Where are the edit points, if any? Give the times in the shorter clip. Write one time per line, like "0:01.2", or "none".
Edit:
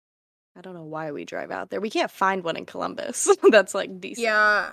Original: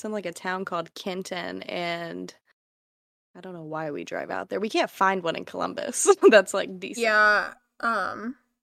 none